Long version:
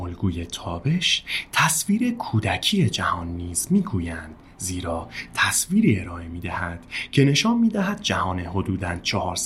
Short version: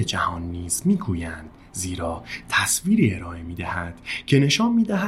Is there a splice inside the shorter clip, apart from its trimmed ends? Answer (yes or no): no